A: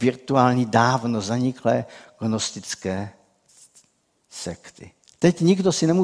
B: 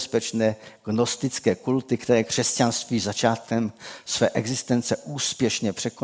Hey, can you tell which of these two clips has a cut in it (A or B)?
A